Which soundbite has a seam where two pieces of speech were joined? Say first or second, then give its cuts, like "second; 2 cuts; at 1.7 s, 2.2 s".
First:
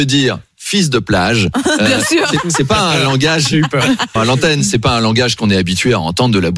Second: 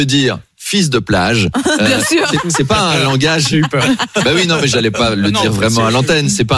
first; 1 cut; at 4.2 s